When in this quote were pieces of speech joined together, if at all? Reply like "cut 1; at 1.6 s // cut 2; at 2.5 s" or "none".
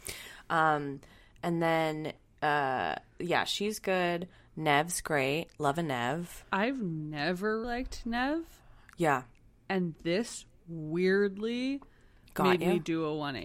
cut 1; at 6.4 s // cut 2; at 7.6 s